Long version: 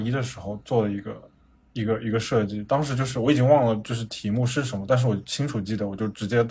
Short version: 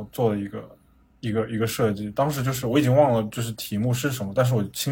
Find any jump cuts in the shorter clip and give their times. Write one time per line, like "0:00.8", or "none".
none